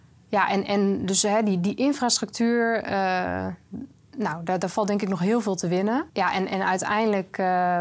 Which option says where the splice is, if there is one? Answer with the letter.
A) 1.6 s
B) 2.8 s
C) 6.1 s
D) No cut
C